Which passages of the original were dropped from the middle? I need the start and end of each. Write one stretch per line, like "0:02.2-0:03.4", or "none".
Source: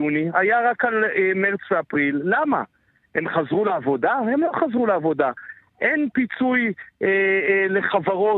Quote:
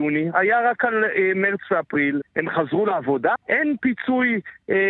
0:02.2-0:03.0
0:04.1-0:05.7